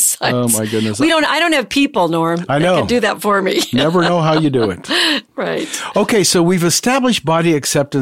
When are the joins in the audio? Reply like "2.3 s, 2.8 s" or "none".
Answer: none